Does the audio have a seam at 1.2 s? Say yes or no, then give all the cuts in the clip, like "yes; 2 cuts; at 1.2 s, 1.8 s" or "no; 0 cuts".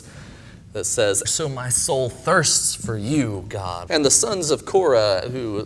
yes; 2 cuts; at 1.2 s, 3.9 s